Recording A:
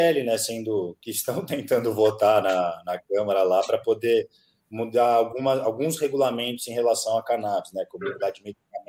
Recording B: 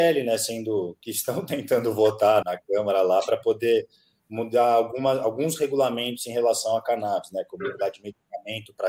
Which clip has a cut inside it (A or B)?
B